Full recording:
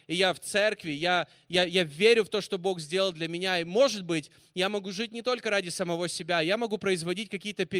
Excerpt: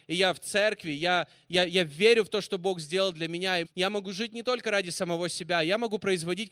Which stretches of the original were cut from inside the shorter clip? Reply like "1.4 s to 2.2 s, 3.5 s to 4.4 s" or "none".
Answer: 3.6 s to 4.4 s